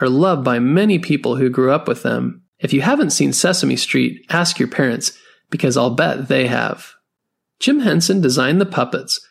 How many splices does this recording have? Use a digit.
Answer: 1